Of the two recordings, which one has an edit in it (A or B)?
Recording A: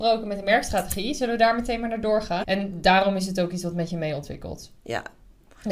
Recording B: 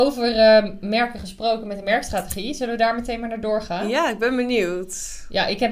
A